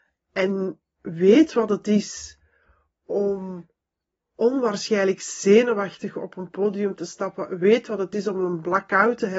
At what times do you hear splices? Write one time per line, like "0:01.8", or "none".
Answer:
none